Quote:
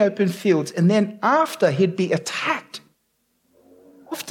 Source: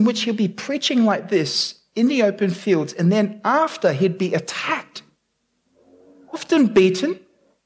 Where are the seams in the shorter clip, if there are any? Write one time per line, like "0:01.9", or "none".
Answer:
none